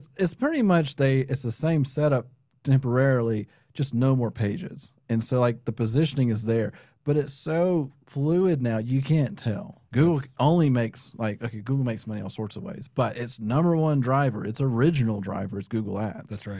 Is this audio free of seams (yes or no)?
no